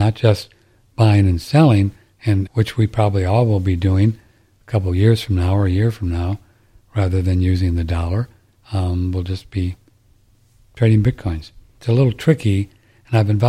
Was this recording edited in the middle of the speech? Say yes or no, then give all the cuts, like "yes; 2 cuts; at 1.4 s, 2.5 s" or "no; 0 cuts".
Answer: yes; 2 cuts; at 2.5 s, 11.8 s